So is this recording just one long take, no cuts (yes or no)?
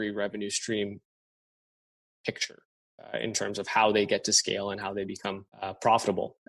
no